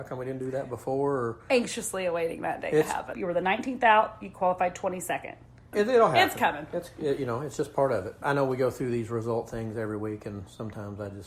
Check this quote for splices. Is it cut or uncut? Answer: cut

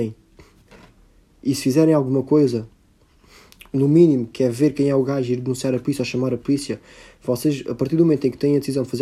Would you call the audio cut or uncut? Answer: uncut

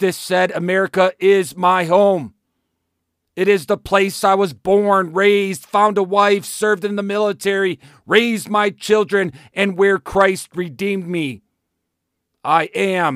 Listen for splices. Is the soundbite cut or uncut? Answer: uncut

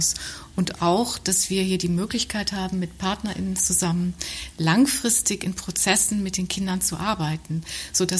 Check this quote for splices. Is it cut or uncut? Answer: uncut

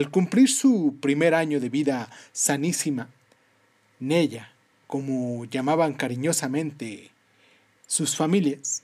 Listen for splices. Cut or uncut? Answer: uncut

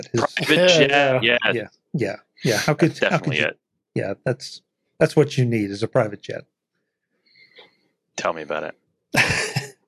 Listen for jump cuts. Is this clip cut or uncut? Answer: uncut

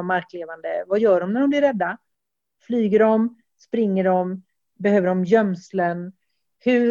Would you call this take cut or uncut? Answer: uncut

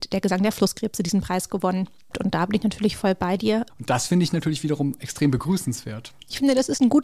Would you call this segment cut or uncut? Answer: cut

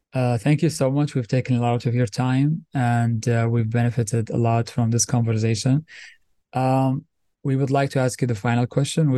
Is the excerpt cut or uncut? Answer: uncut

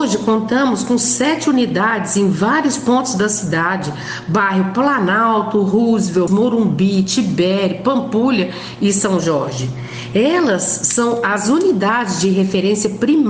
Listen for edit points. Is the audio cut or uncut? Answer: cut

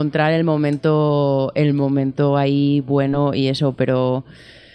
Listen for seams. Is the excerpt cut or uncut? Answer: uncut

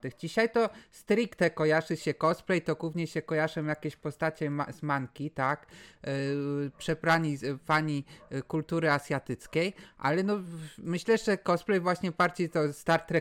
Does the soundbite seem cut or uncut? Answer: uncut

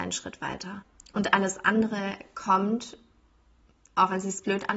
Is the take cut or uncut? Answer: uncut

